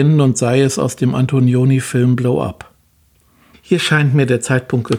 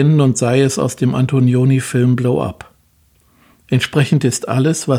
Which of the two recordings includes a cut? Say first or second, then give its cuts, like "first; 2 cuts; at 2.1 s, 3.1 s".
first; 1 cut; at 3.5 s